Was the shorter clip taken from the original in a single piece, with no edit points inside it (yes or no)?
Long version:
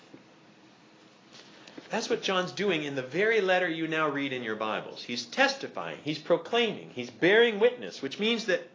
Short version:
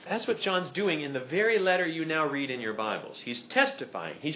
yes